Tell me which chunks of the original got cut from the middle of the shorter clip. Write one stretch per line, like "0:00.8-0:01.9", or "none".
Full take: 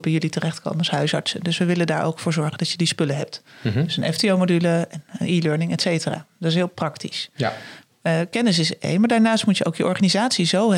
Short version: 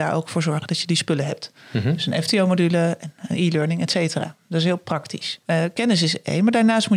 0:07.3-0:08.0